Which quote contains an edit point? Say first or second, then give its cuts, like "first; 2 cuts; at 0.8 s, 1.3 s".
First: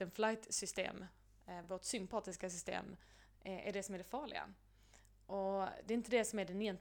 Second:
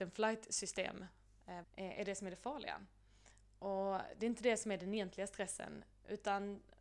second; 1 cut; at 1.6 s